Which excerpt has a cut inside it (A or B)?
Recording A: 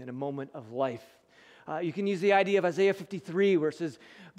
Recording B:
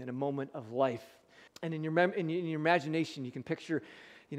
B